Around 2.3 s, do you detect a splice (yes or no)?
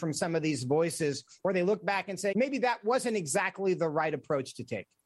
yes